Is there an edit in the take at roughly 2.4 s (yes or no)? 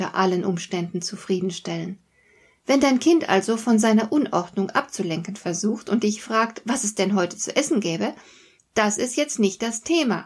no